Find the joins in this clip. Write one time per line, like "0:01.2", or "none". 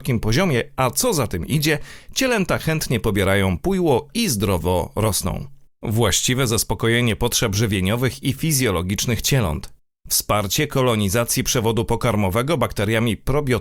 0:05.8